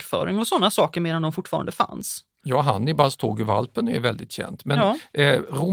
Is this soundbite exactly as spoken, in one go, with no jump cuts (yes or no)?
yes